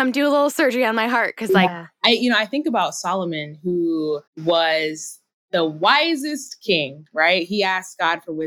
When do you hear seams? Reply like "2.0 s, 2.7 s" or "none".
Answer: 1.7 s, 4.3 s